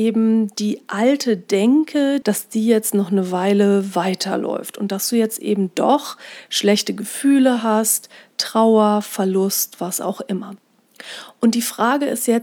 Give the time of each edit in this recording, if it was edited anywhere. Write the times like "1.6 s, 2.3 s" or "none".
2.2 s